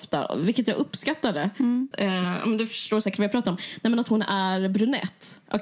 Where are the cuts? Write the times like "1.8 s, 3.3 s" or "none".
1.9 s